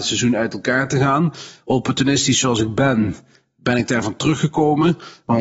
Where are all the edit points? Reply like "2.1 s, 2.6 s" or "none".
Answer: none